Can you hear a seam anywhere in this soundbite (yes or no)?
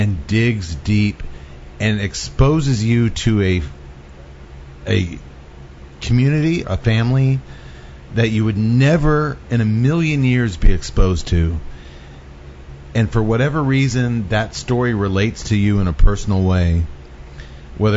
yes